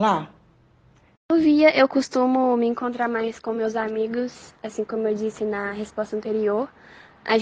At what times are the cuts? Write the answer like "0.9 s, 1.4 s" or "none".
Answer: 1.2 s